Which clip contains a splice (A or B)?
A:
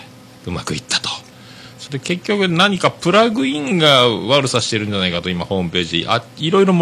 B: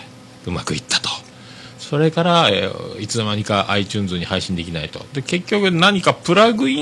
A